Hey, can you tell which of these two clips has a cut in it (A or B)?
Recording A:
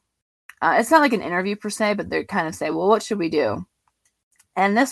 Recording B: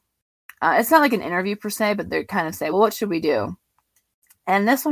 B